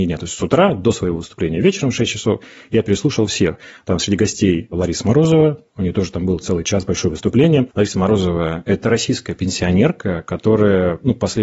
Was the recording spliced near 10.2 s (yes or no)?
no